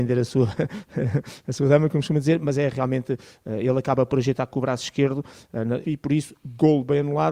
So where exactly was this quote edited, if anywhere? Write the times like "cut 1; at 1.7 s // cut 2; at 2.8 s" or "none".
cut 1; at 5.8 s